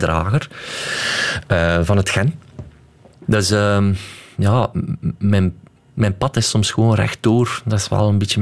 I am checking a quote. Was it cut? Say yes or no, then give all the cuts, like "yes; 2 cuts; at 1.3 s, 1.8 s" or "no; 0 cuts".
yes; 1 cut; at 3.3 s